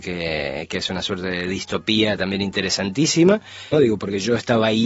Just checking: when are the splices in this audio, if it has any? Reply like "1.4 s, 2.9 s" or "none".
3.7 s

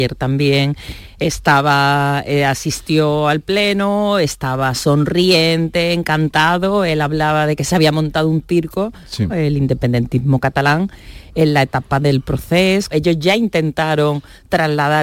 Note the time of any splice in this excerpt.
9.3 s, 12.9 s

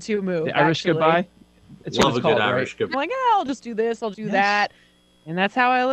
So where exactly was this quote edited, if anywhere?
2.9 s, 4.1 s

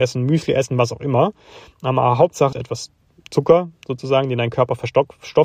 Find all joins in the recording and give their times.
2.5 s

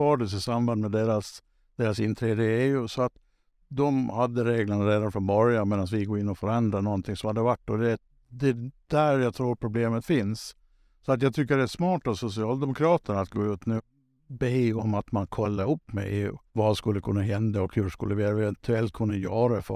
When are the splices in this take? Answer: 13.8 s, 16.5 s

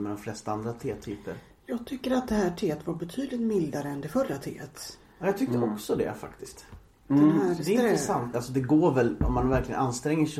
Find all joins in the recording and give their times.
8.3 s

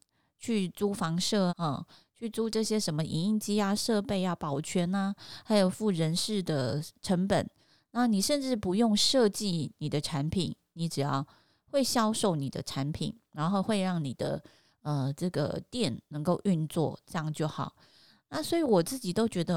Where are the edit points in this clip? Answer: 1.5 s

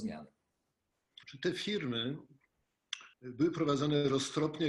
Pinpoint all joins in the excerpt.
1.2 s, 3.1 s

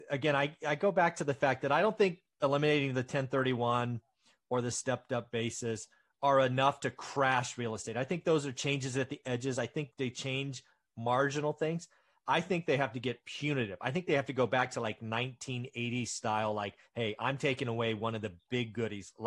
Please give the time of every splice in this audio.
9.9 s

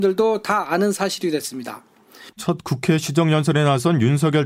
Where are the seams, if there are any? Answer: 2.3 s

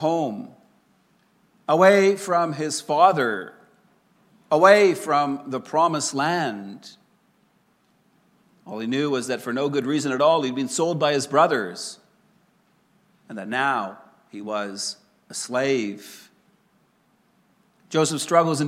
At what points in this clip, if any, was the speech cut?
8.6 s

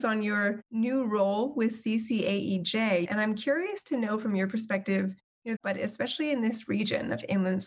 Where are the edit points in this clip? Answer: 3.0 s, 5.6 s

